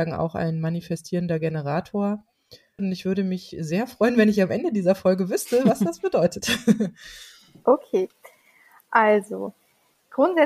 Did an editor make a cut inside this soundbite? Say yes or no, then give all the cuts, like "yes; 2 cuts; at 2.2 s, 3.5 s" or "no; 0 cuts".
yes; 1 cut; at 2.8 s